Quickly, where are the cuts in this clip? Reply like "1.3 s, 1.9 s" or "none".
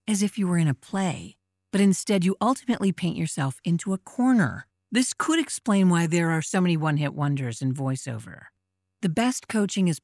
4.7 s